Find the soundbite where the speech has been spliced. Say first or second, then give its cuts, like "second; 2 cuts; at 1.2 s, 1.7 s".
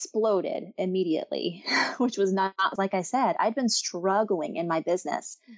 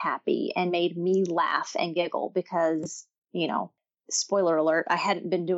first; 1 cut; at 2.8 s